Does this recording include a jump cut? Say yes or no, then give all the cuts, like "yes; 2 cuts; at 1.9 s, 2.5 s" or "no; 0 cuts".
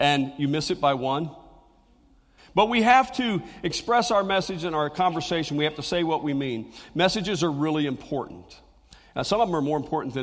yes; 1 cut; at 2.4 s